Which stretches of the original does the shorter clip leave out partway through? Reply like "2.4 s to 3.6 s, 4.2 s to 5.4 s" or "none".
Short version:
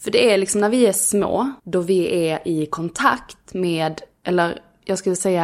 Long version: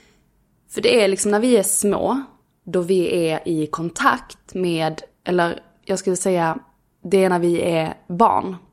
2.3 s to 2.6 s